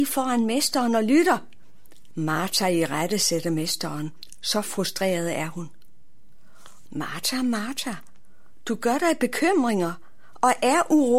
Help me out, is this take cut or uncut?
cut